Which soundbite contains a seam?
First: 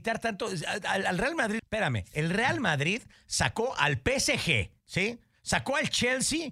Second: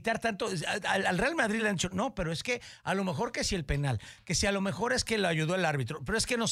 first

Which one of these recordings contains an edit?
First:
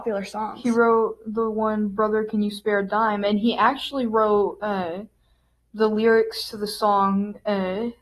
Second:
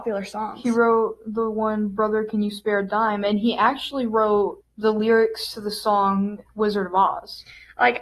second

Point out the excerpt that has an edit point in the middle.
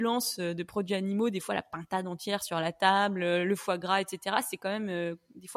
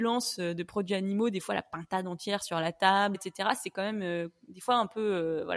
second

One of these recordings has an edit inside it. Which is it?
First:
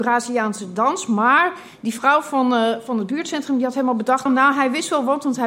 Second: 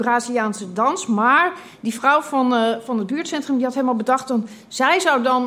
first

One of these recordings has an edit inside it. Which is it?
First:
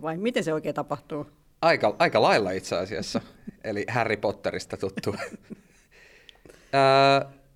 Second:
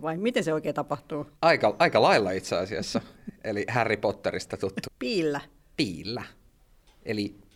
second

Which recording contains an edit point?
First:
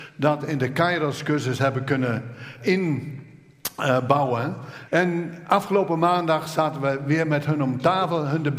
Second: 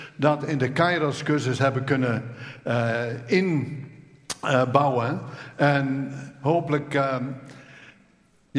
first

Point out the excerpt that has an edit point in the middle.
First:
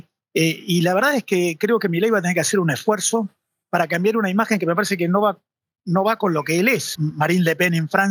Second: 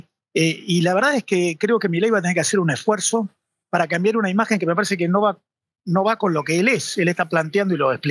first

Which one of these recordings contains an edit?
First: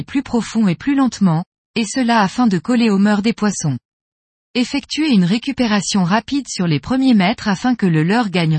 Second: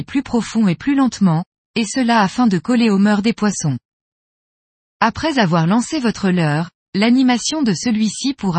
first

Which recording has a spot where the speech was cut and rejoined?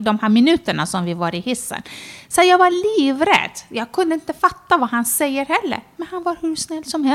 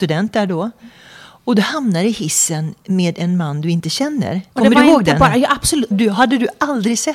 second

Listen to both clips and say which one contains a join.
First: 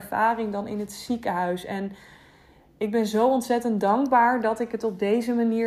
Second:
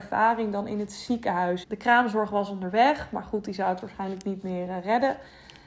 second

